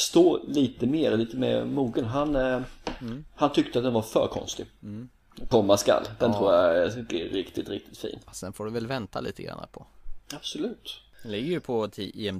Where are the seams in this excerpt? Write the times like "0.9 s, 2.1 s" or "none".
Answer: 5.5 s, 10.2 s